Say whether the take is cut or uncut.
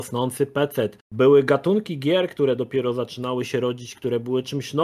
cut